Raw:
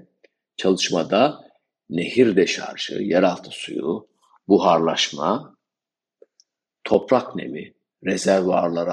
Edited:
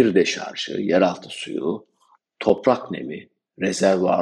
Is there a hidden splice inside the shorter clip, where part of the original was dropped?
yes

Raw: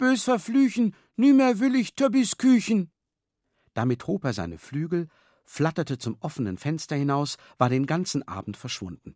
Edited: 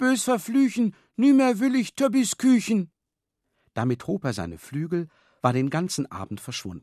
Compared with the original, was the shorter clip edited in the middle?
yes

